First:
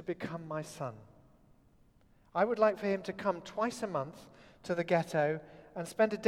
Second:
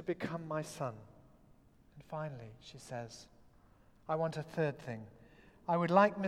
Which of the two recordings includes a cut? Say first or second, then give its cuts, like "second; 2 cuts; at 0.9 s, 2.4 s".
second; 1 cut; at 1.7 s